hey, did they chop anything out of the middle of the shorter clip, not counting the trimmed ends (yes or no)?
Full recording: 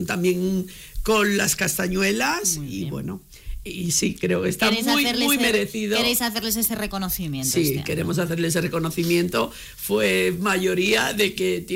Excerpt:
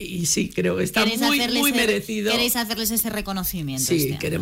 no